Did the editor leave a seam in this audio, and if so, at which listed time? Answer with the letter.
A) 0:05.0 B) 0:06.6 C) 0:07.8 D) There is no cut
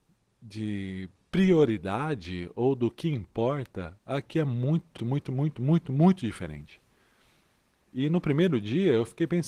A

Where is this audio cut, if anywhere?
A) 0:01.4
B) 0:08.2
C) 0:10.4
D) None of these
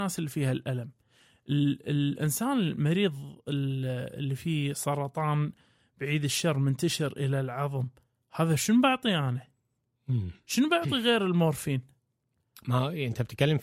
D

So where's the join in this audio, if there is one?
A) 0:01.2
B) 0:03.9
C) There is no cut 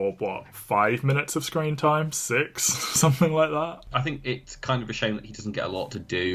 B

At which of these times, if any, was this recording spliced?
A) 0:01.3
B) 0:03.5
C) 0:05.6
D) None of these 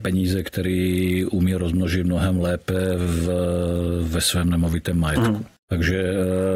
C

